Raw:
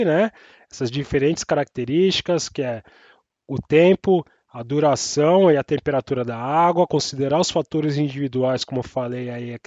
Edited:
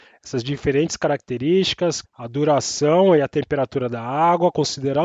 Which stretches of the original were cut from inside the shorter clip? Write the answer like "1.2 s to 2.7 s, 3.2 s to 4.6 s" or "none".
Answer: 2.5 s to 4.4 s